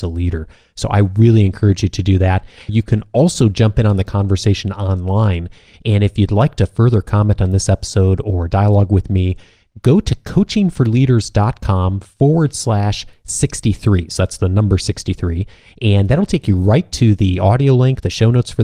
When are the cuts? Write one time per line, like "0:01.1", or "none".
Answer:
0:02.7

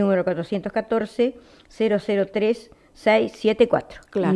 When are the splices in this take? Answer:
none

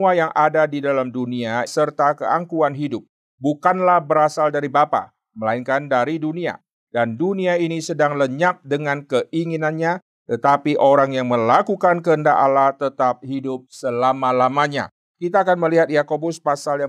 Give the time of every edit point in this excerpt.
0:01.7

